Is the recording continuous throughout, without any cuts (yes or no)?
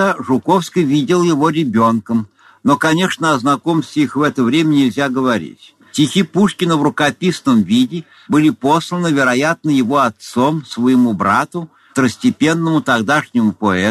yes